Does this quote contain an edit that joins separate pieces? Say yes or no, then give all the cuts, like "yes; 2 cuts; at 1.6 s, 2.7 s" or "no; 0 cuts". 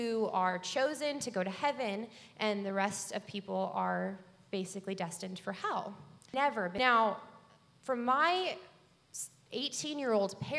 no; 0 cuts